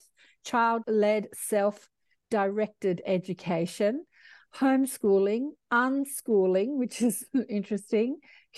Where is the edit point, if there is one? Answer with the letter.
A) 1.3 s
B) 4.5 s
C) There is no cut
C